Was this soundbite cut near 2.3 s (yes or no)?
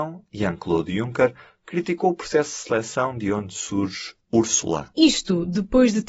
no